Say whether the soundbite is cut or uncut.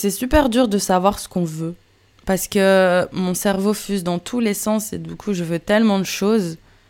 cut